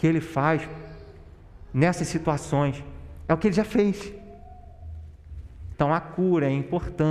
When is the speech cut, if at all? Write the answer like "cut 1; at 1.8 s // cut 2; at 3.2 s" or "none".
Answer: cut 1; at 5.7 s